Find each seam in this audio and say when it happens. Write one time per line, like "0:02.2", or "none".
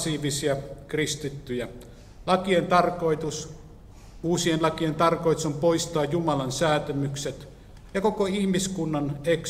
0:02.2